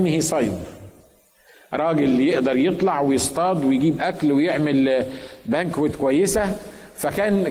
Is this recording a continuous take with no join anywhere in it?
yes; 0 cuts

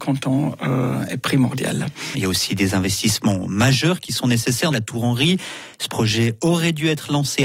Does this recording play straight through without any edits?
no; 2 cuts; at 2.1 s, 4.7 s

